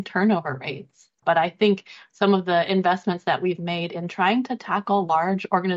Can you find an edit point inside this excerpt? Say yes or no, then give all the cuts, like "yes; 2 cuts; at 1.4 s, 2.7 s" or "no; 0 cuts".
yes; 1 cut; at 1.2 s